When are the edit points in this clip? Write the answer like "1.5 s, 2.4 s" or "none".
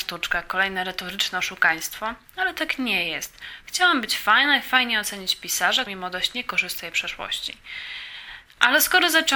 5.9 s